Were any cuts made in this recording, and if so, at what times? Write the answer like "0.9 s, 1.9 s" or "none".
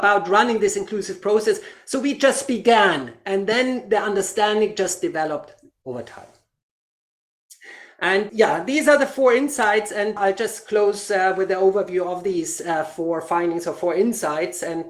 8.3 s, 10.2 s